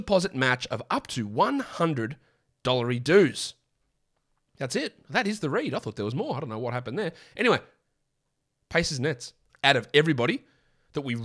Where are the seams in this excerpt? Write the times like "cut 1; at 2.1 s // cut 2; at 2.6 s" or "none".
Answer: cut 1; at 9.5 s